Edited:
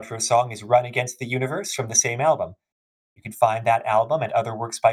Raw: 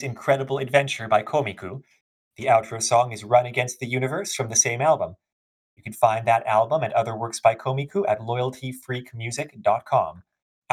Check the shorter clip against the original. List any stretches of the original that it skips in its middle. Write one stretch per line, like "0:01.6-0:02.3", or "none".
none